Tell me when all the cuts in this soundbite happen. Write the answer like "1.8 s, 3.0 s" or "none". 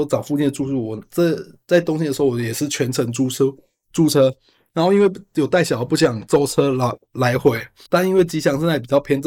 7.9 s